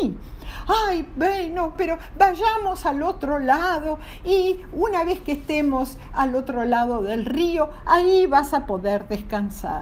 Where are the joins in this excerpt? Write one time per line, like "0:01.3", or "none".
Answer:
0:01.7